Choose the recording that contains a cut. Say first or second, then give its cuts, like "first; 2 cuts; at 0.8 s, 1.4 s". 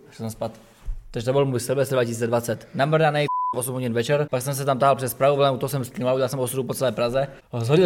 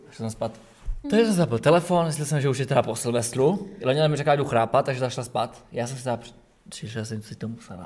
second; 1 cut; at 1.0 s